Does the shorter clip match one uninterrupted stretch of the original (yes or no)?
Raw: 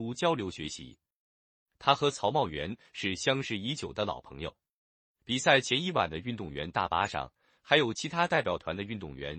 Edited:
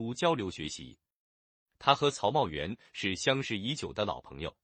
yes